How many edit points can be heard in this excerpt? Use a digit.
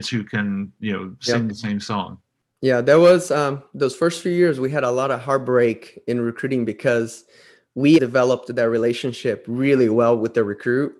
1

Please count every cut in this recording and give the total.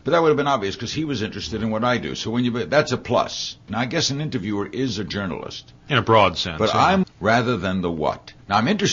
2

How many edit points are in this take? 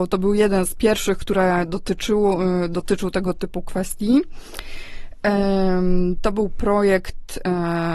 0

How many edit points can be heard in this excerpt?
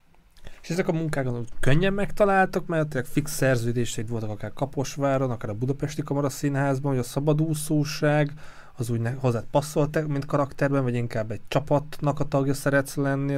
0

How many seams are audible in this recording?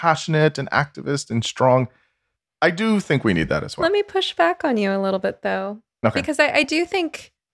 0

